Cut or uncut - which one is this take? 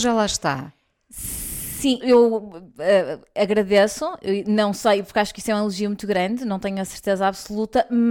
cut